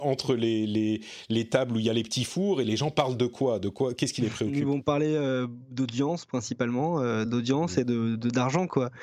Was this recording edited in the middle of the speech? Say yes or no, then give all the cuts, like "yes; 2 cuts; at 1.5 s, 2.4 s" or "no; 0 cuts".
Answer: no; 0 cuts